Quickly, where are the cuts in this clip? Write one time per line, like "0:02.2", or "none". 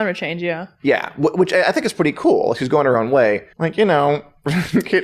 0:03.5